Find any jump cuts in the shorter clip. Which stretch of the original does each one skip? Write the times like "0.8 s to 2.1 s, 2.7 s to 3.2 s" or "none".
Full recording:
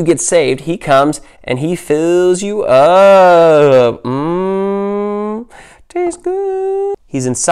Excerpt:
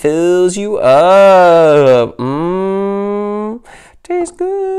none